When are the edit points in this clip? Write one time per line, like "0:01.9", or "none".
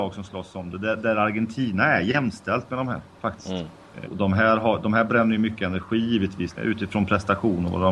0:04.1
0:06.6